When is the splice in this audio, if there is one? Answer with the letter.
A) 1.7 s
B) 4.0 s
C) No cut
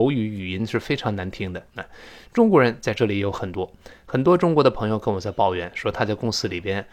A